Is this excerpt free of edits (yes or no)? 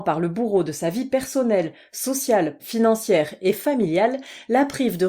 no